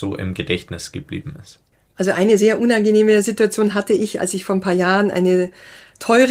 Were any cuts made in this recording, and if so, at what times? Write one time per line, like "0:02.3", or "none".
none